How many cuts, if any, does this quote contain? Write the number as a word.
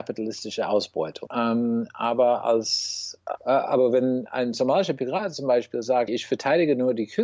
three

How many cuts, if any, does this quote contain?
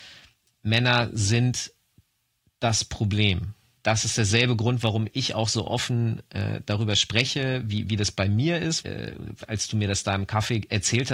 two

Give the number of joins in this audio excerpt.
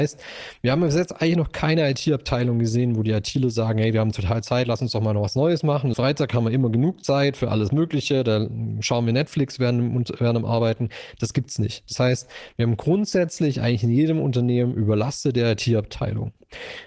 one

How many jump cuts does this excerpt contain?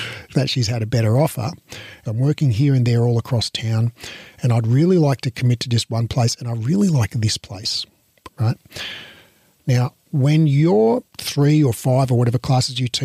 three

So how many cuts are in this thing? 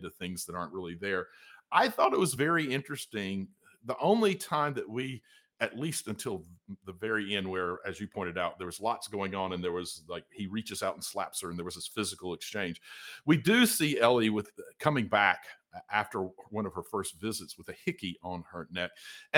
zero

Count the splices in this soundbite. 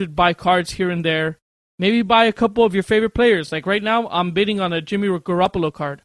zero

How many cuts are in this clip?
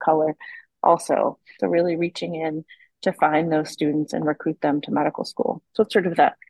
one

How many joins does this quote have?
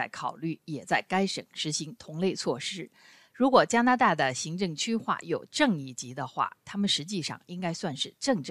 one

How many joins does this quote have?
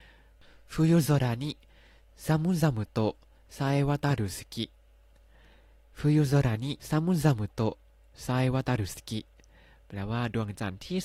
one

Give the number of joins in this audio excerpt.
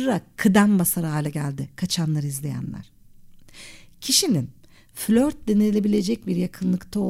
zero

